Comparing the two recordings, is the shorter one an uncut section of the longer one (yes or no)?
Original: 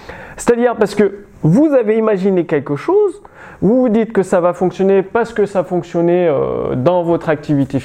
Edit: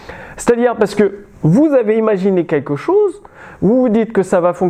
yes